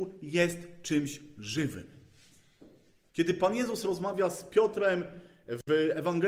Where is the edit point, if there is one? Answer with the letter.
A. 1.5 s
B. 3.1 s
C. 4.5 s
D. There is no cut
B